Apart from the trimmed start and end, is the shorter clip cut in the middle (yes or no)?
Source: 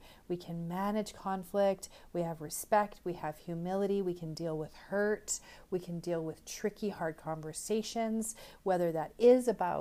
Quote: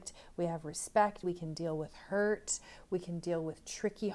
yes